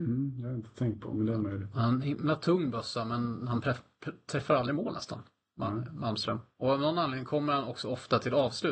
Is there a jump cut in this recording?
no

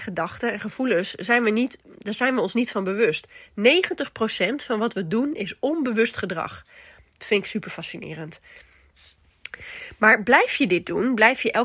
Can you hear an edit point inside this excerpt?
no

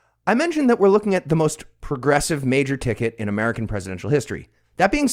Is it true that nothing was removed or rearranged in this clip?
yes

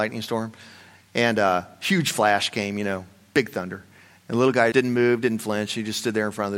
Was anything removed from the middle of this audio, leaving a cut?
yes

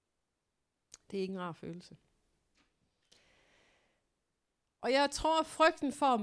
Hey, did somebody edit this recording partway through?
no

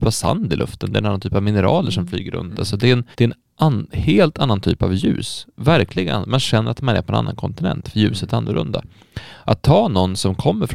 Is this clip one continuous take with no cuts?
no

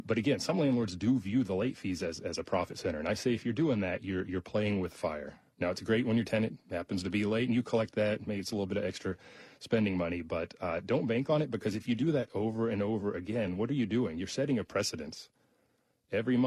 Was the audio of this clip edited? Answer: no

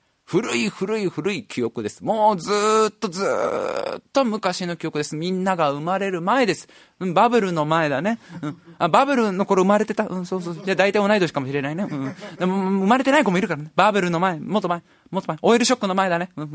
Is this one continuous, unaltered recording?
yes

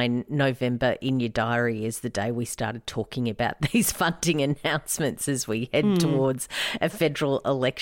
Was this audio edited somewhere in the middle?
no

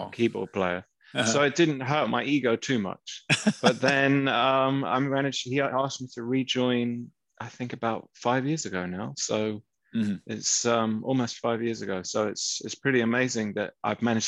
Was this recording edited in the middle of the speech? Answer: no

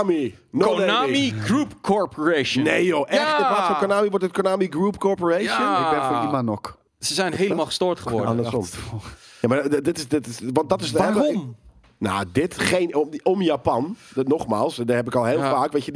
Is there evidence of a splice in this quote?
yes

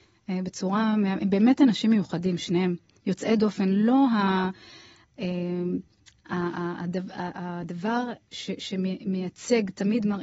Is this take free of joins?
yes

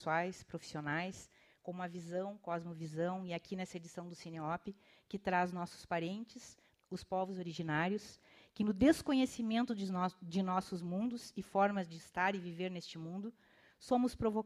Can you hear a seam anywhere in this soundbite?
no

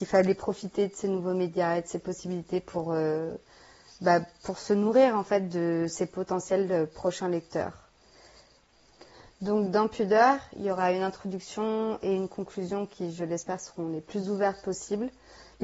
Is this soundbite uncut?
yes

